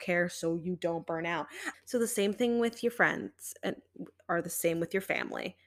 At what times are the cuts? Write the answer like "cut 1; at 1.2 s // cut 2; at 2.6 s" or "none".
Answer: cut 1; at 1.7 s